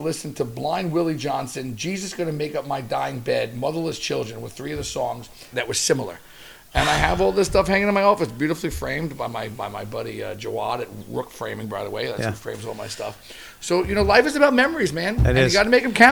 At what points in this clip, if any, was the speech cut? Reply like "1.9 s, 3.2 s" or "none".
5.5 s

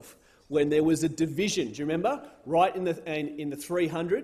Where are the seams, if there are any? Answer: none

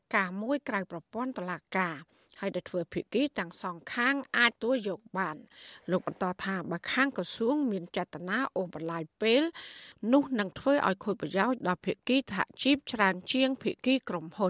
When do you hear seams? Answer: 4.5 s

